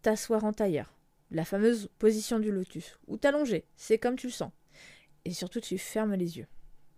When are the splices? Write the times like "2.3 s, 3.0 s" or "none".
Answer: none

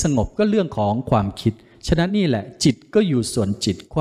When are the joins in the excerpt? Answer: 2.1 s

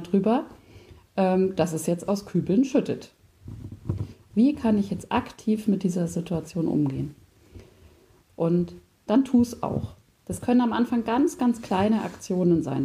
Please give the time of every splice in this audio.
4.3 s

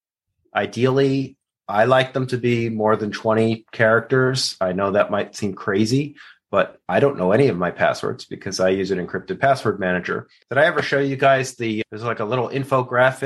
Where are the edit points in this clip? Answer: 10.4 s

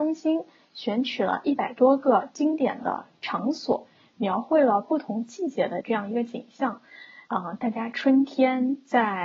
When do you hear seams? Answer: 7.3 s

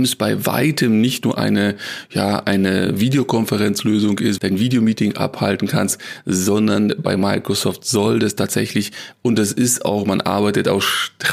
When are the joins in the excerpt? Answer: 4.4 s

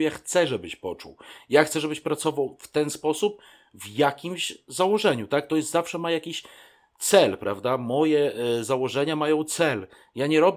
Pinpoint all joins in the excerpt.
none

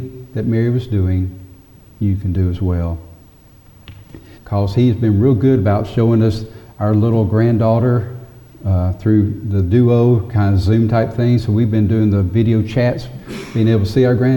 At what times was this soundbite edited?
4.4 s

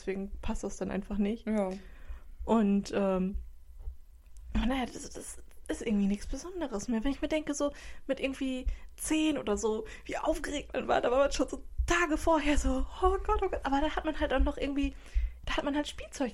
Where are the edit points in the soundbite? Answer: none

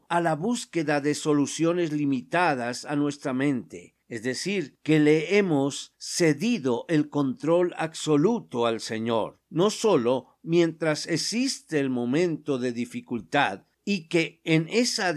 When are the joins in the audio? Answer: 13.7 s

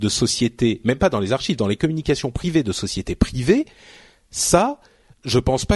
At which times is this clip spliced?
none

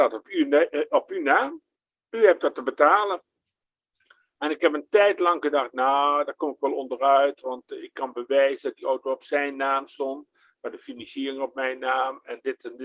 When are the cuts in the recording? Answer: none

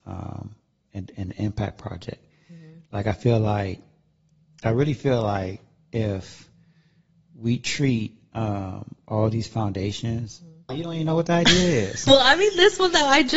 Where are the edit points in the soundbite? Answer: 10.7 s

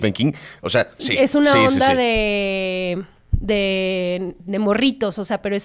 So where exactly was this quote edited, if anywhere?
1.0 s

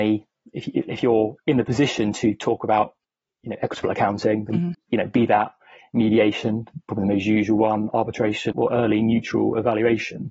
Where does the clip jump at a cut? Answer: 4.7 s, 8.5 s

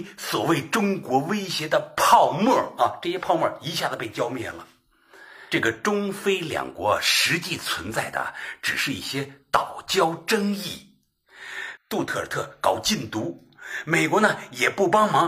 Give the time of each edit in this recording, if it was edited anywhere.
11.8 s

